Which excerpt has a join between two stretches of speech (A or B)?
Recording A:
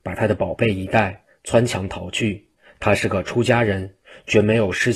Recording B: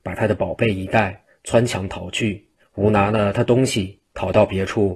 B